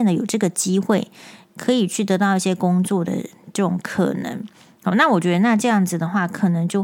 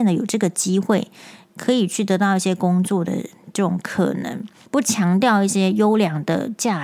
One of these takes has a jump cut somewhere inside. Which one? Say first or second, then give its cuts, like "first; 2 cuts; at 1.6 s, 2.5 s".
second; 1 cut; at 4.7 s